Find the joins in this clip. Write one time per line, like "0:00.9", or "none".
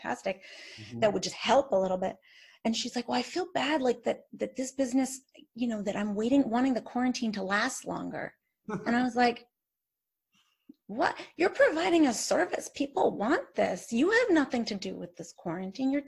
none